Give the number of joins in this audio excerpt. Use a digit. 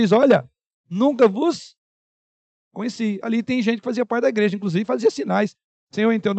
0